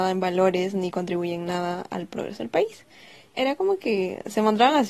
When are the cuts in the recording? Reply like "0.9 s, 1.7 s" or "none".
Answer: 3.3 s

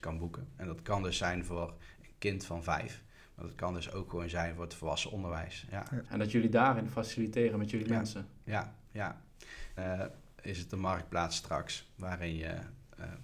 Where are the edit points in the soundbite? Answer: 6.0 s, 9.8 s

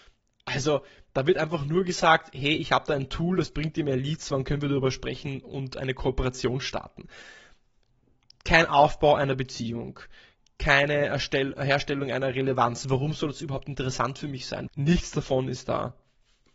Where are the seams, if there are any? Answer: 14.7 s

